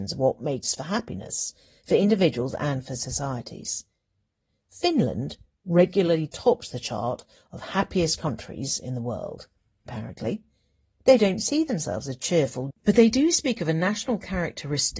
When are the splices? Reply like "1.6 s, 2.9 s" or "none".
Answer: 9.9 s, 12.7 s